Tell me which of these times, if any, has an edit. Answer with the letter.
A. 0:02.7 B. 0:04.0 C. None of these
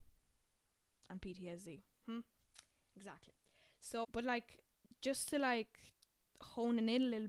B